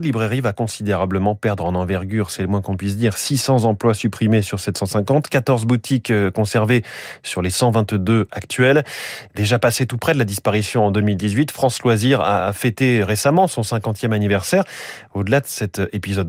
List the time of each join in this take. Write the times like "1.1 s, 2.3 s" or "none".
none